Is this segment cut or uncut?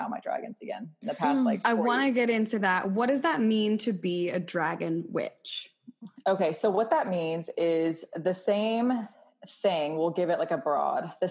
uncut